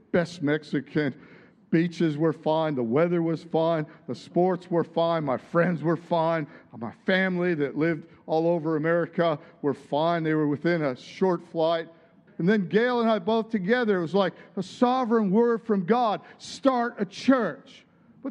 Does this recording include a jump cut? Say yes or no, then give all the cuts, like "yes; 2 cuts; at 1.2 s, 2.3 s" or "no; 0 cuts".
yes; 1 cut; at 12.3 s